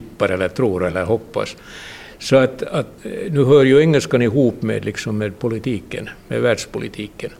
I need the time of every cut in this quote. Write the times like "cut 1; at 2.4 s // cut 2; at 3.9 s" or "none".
none